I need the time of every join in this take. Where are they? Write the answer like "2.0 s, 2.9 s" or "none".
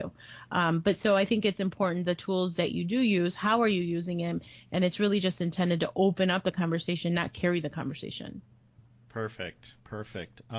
none